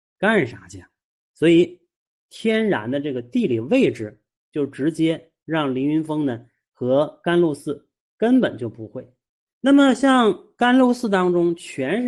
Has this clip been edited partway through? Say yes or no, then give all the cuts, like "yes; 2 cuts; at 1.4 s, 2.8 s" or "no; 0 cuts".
yes; 1 cut; at 8.0 s